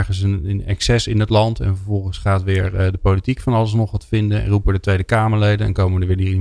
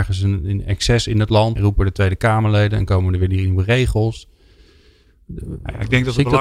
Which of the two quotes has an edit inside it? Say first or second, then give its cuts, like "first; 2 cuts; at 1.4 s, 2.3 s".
second; 1 cut; at 1.6 s